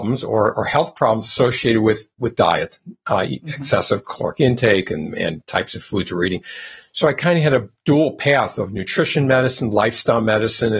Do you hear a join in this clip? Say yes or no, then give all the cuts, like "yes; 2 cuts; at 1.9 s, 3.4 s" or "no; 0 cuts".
no; 0 cuts